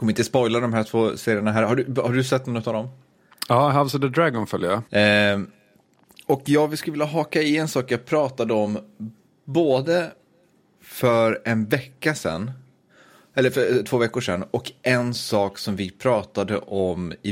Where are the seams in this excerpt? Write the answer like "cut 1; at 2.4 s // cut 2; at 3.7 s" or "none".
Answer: cut 1; at 4.9 s